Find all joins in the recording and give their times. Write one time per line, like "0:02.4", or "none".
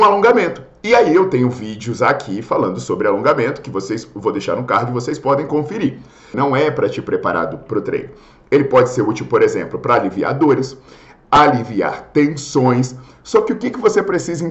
0:06.3